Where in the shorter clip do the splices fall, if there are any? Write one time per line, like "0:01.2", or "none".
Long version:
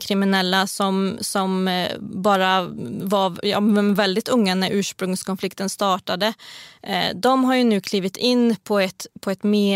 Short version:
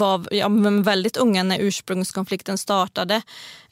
none